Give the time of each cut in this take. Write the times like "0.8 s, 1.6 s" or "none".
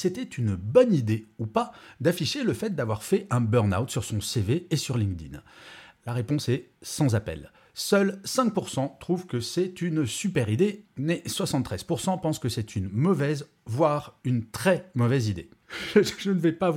10.8 s